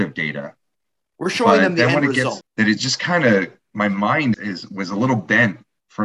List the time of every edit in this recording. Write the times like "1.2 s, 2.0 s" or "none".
2.4 s, 4.3 s

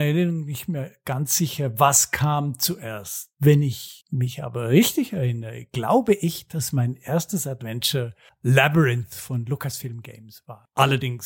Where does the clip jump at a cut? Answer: none

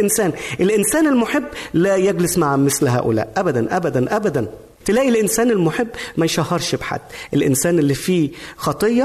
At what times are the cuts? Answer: none

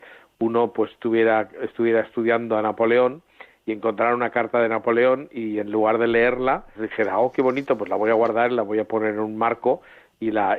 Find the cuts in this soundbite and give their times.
6.7 s

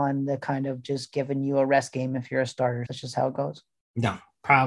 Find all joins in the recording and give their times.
2.9 s

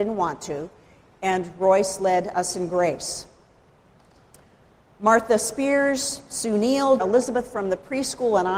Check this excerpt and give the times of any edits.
7.0 s

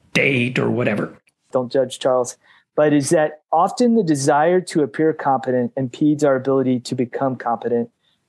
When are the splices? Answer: 1.5 s

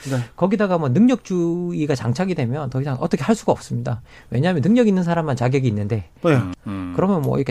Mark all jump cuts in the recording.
6.5 s

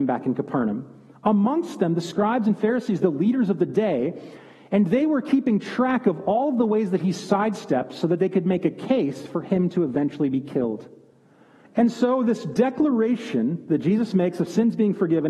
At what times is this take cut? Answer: 11.6 s

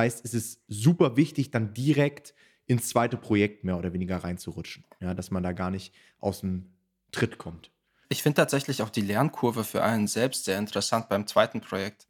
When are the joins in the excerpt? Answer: none

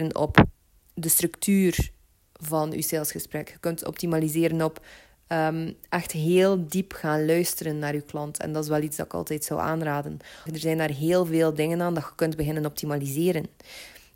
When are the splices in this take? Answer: 10.5 s

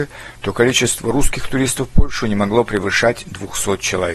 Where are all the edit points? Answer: none

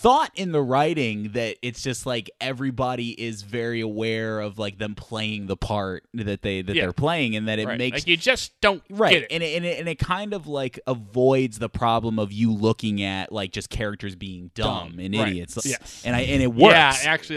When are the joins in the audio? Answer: 15.6 s

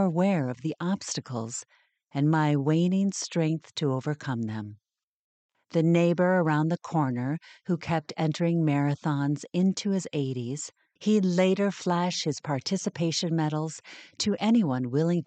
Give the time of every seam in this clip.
5.5 s, 11.0 s

